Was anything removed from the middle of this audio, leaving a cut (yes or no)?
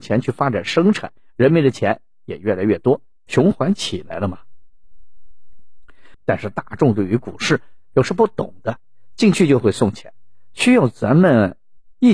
yes